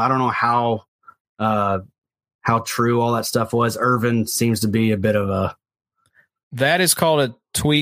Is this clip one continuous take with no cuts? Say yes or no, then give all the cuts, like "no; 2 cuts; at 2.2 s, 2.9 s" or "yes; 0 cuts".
yes; 0 cuts